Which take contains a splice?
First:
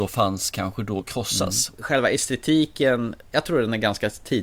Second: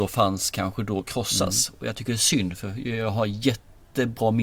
first; 1 cut; at 1.8 s

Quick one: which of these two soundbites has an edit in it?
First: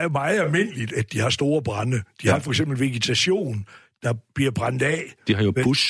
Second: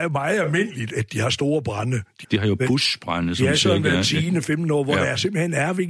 second; 1 cut; at 2.2 s

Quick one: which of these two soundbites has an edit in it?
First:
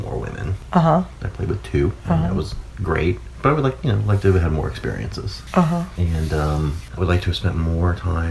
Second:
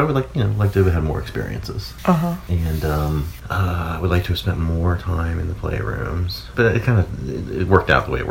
first; 1 cut; at 7.0 s

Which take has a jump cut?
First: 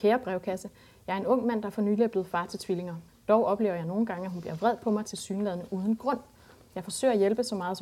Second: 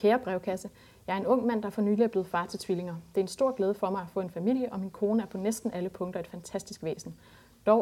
first; 1 cut; at 3.1 s

